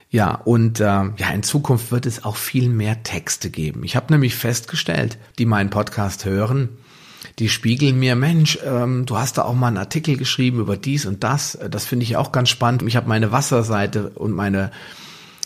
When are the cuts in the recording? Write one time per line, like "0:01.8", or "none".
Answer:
0:05.3
0:12.8